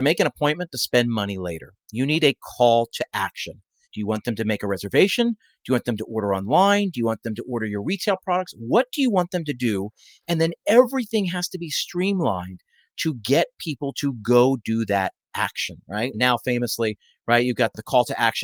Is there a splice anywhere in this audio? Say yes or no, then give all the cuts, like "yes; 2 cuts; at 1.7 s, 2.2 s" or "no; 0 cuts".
yes; 2 cuts; at 3.8 s, 16.1 s